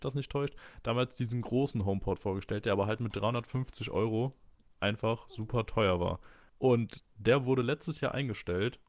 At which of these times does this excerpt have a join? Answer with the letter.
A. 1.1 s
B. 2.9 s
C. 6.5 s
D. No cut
C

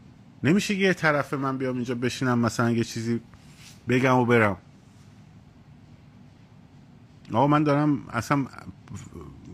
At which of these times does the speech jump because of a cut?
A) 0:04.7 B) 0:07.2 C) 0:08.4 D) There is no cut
D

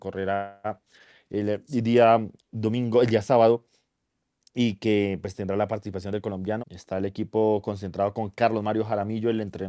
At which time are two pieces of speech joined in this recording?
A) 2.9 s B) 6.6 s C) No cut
B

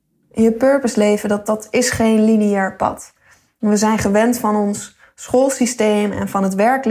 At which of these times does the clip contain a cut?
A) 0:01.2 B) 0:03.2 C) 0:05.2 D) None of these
D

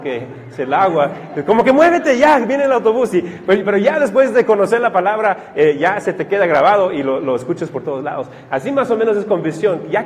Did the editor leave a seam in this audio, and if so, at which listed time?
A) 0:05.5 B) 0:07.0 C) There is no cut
C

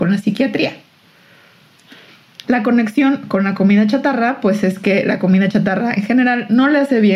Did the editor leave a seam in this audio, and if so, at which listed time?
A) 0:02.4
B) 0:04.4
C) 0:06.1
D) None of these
A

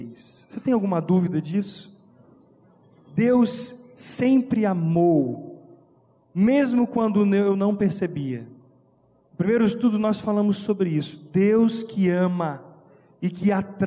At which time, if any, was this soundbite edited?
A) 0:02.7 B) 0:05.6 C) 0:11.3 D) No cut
D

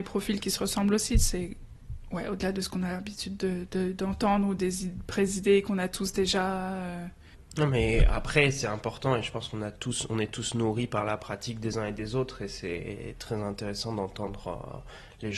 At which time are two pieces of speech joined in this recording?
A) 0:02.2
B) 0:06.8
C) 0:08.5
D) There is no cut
D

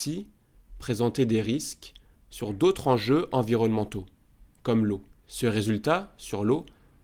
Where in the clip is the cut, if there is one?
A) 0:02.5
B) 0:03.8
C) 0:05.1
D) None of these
C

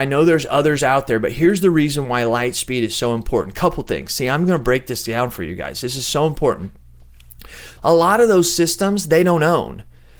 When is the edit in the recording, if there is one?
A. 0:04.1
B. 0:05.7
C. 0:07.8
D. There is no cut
C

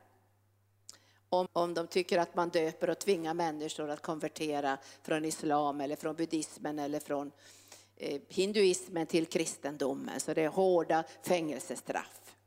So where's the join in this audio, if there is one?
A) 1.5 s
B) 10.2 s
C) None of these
A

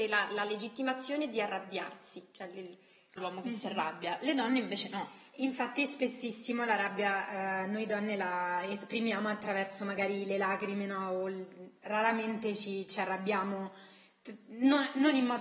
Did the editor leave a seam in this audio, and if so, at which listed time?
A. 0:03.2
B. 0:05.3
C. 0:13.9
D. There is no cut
A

